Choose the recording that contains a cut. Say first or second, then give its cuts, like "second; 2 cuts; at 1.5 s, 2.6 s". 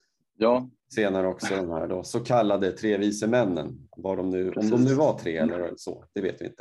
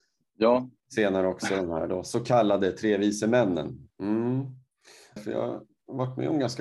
second; 2 cuts; at 3.9 s, 5.2 s